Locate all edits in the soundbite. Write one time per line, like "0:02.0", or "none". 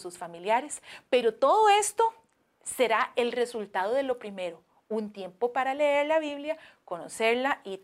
none